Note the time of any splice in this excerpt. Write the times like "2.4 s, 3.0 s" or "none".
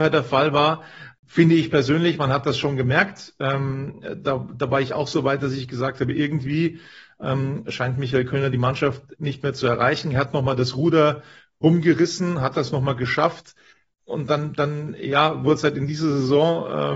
none